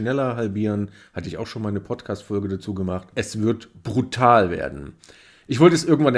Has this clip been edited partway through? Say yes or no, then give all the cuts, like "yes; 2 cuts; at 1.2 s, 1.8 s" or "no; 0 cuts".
no; 0 cuts